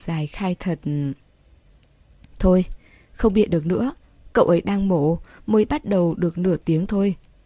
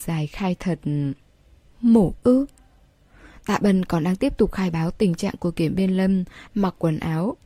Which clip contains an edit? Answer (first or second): second